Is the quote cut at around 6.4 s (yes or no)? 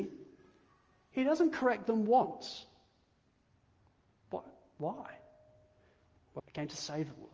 yes